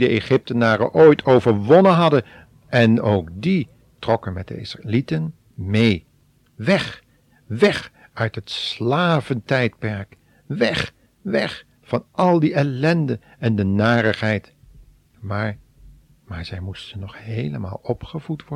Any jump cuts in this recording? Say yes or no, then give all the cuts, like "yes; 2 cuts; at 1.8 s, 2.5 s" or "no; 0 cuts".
no; 0 cuts